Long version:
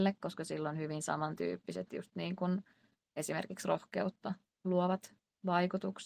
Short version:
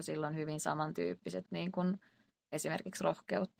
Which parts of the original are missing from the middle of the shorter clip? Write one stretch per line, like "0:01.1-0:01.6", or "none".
0:01.9-0:02.1

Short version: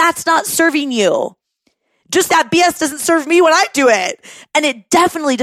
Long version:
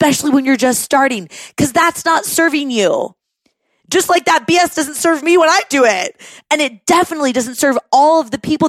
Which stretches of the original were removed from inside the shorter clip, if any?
0:04.1-0:04.2

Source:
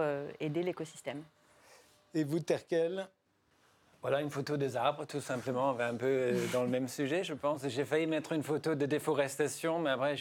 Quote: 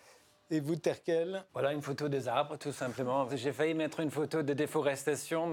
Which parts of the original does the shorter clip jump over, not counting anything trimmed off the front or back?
0:03.1-0:04.0
0:05.8-0:07.6

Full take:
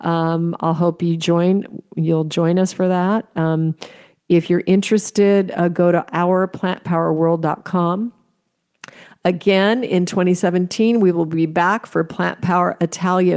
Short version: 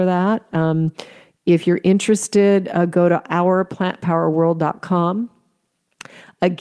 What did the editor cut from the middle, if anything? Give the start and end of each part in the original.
none

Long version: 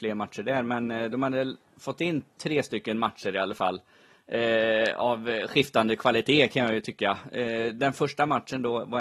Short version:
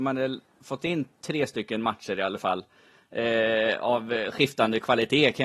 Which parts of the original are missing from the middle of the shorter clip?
none

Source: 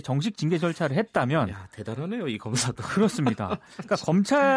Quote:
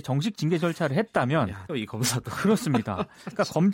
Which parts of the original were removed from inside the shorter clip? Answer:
0:01.7-0:02.2

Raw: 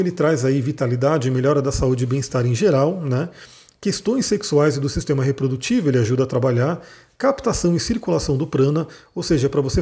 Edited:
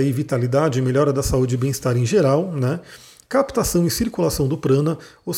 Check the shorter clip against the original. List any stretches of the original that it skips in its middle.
0:03.7-0:07.1

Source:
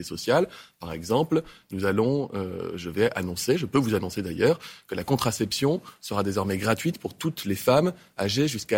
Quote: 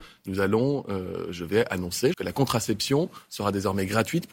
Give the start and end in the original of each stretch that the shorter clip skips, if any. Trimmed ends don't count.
0:03.6-0:04.9

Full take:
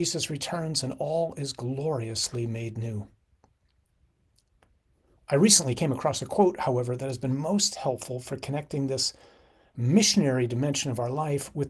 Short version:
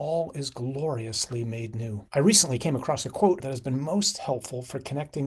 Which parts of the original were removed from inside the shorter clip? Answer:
0:03.1-0:05.2
0:06.6-0:07.0

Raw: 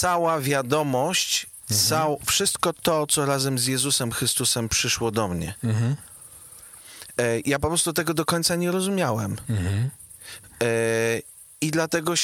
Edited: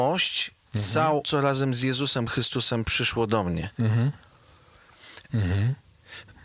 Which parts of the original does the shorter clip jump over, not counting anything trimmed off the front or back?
0:02.2-0:03.1
0:07.1-0:09.4

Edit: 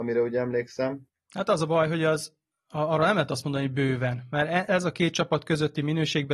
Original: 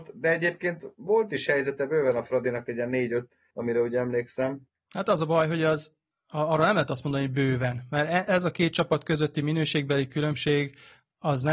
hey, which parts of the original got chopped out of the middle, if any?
none

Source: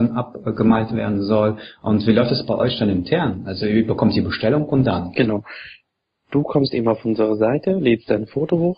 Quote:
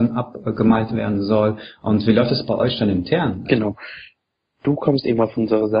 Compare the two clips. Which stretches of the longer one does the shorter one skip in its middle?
0:03.4-0:05.1

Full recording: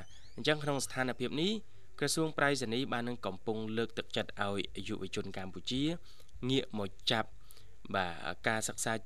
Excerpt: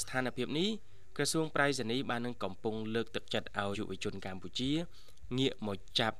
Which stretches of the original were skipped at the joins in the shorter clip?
0:04.5-0:04.8

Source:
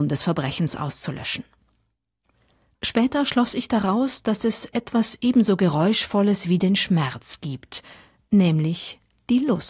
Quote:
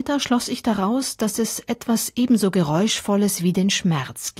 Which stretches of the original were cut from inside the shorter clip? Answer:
none

